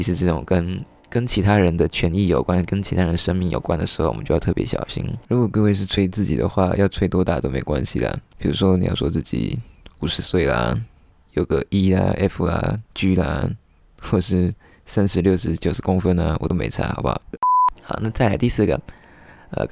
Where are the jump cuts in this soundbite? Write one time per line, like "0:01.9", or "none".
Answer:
0:05.2
0:17.2